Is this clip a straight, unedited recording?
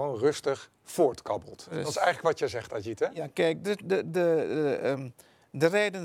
yes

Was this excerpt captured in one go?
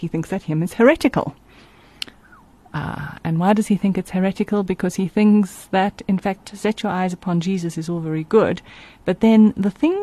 no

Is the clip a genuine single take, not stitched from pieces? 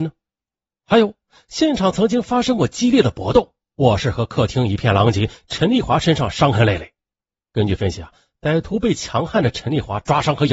yes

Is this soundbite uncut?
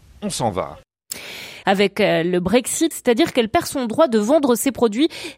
no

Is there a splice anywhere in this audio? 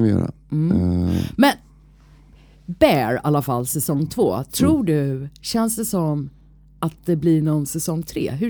no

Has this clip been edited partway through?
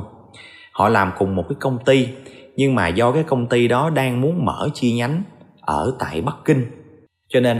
no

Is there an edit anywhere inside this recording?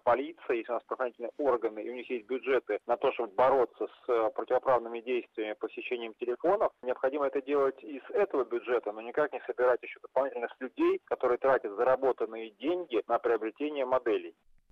no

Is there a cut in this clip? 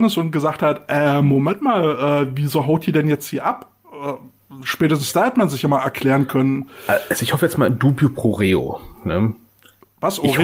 no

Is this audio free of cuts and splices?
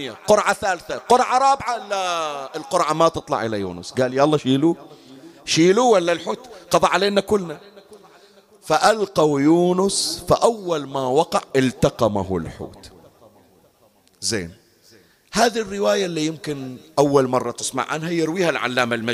yes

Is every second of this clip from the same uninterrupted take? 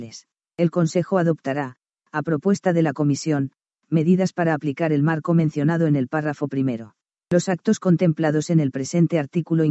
yes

